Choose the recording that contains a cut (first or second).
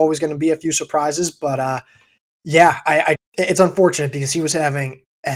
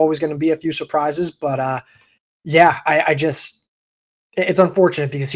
first